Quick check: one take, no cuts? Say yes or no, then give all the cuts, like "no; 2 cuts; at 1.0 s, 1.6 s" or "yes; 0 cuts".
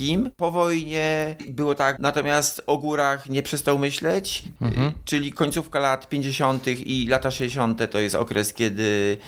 no; 2 cuts; at 2.0 s, 4.6 s